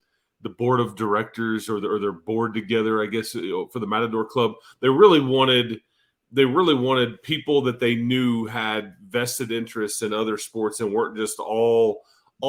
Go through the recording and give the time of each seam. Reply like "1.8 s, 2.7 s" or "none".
none